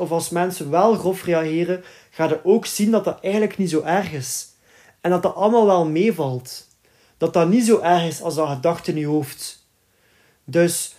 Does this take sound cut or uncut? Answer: uncut